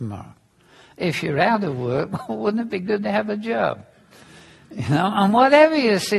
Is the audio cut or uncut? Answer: uncut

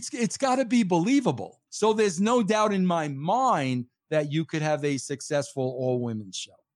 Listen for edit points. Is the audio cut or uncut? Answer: cut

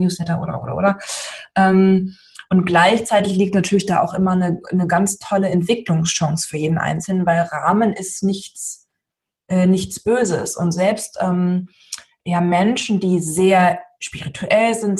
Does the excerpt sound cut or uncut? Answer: uncut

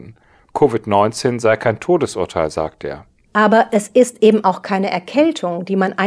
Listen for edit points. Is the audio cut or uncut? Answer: cut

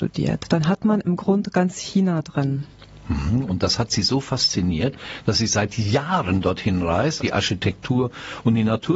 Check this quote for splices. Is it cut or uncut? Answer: cut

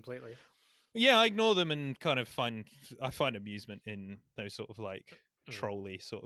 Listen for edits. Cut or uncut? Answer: uncut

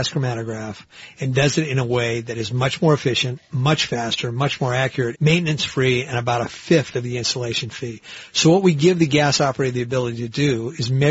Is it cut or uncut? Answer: cut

